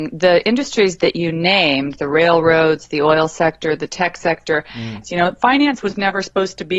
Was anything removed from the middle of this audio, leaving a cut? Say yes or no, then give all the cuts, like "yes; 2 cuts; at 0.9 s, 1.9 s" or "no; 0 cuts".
yes; 1 cut; at 5.0 s